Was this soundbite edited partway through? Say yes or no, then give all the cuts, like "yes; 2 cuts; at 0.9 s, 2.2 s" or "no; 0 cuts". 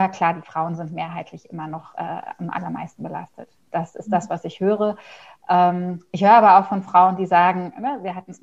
no; 0 cuts